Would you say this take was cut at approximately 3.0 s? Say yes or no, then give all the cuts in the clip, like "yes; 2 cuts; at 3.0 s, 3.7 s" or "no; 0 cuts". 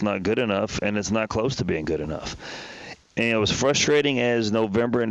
yes; 1 cut; at 3.0 s